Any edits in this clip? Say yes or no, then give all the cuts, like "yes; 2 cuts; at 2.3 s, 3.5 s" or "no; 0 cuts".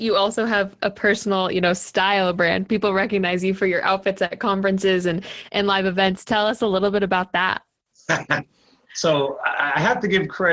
no; 0 cuts